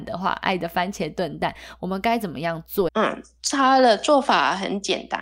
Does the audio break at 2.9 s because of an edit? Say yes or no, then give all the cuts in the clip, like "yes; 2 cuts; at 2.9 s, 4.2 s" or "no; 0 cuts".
yes; 1 cut; at 2.9 s